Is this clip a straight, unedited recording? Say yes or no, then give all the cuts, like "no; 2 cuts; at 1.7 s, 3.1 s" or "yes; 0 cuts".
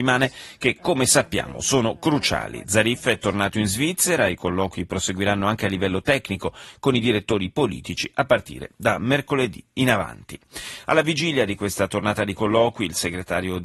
yes; 0 cuts